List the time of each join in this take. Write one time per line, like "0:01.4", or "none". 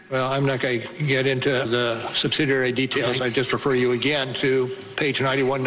0:01.6